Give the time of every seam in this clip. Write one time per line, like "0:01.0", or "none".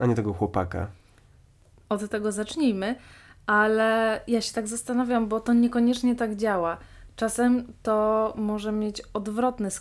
none

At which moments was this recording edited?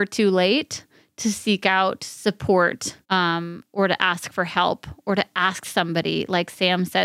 0:03.0

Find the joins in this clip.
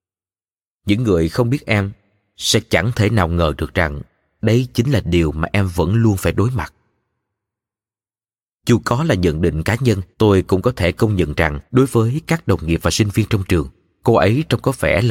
0:10.1
0:11.7

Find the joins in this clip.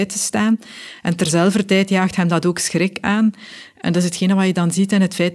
none

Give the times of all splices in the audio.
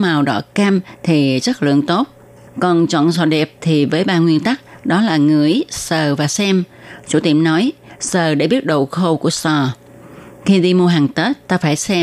0:08.0

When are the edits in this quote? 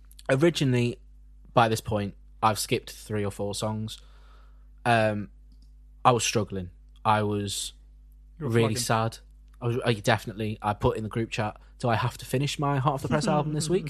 none

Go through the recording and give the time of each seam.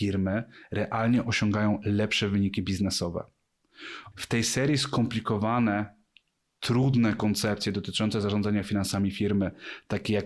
0:04.1

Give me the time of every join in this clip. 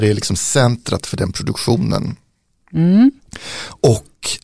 none

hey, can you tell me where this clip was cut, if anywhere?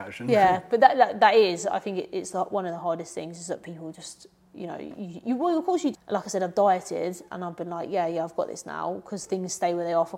0:05.9

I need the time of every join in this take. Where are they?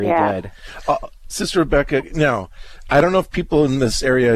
0:01.3

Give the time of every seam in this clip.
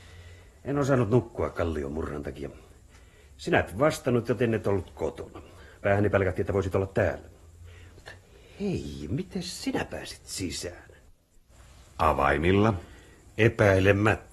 none

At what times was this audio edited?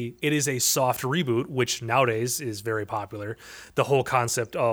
none

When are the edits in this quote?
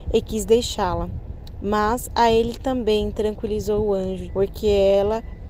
0:04.3

